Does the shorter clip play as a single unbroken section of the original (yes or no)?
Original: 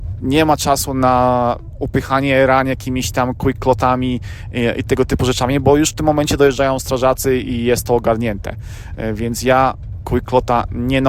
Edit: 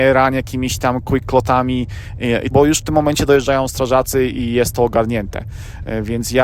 no